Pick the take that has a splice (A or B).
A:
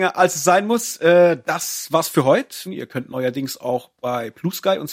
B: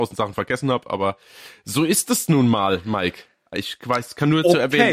A